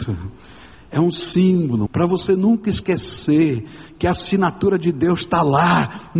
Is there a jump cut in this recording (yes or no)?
yes